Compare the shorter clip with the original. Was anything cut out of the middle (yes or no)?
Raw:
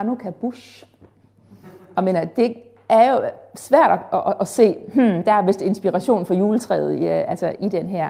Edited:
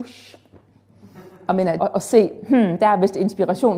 yes